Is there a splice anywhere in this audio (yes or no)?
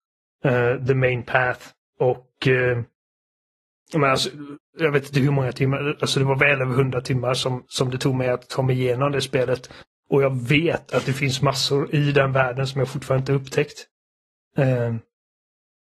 no